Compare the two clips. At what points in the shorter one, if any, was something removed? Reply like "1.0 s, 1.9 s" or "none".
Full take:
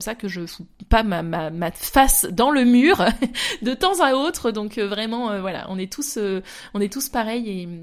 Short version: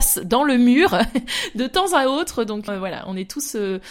2.7 s